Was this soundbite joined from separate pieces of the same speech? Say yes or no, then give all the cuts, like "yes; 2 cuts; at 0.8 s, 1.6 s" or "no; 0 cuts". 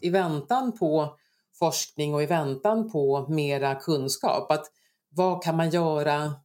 no; 0 cuts